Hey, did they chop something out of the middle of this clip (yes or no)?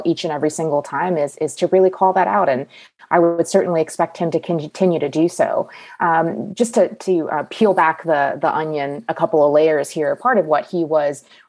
no